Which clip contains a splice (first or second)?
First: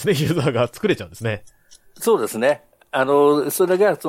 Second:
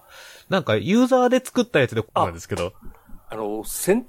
second